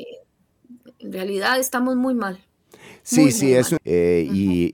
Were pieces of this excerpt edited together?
yes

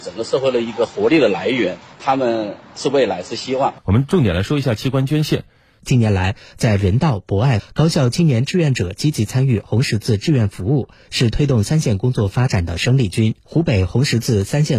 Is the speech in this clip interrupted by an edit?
yes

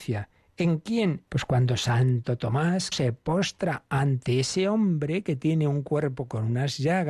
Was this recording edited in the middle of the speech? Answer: yes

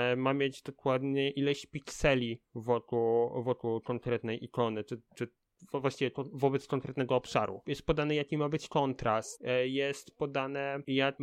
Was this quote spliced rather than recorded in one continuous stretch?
no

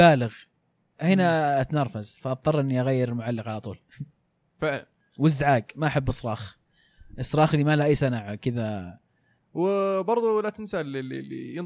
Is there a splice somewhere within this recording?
no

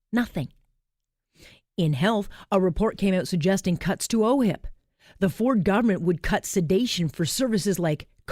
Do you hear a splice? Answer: no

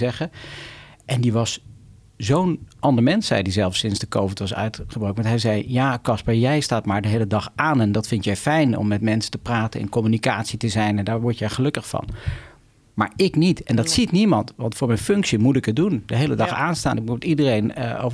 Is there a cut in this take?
no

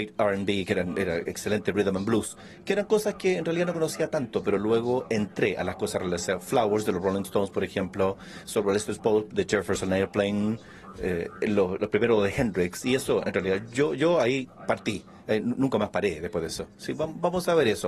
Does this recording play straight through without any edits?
yes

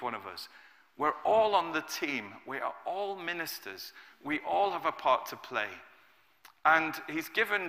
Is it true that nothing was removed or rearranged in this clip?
yes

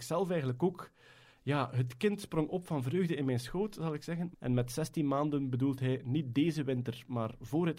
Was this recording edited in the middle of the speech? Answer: yes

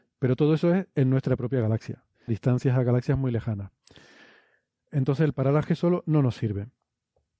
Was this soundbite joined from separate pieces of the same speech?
yes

